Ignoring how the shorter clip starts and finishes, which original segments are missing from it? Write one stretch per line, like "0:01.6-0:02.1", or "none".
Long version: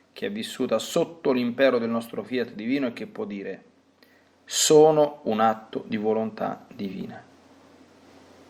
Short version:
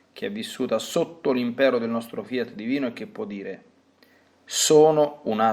none